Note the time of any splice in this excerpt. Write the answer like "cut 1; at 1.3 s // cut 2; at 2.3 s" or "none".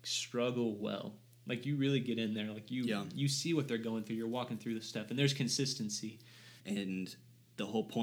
cut 1; at 6.6 s

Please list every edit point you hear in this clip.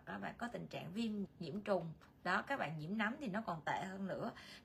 cut 1; at 1.2 s

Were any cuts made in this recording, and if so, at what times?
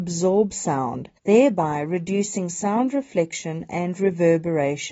cut 1; at 1.2 s

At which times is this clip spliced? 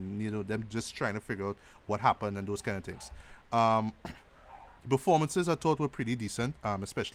cut 1; at 4.8 s

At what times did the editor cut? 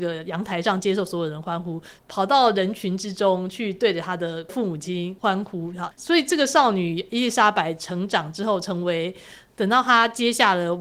cut 1; at 2.0 s // cut 2; at 5.9 s

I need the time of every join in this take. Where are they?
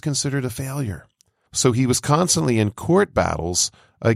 cut 1; at 1.5 s

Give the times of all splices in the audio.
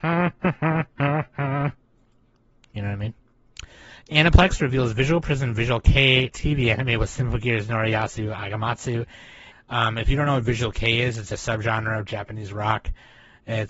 cut 1; at 9.5 s // cut 2; at 11.3 s

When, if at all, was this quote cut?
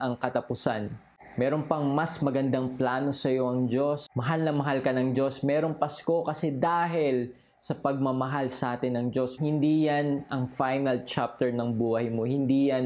cut 1; at 9.4 s

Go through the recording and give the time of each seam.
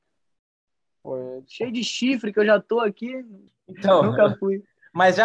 cut 1; at 1.5 s // cut 2; at 3.5 s

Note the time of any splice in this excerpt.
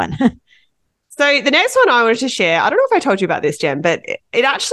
none

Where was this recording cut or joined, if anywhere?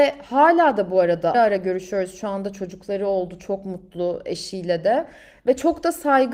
cut 1; at 1.3 s

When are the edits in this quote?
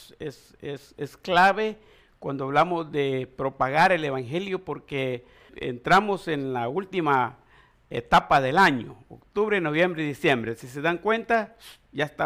cut 1; at 5.5 s

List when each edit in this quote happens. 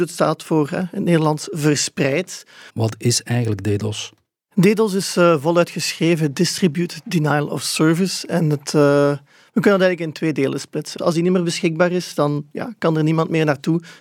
cut 1; at 2.7 s // cut 2; at 11.0 s

